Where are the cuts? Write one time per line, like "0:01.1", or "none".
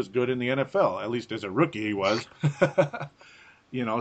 none